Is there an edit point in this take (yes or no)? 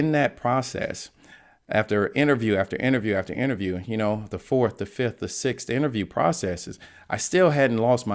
no